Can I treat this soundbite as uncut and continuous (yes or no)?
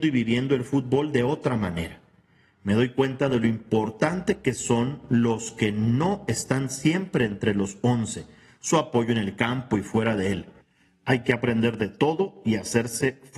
yes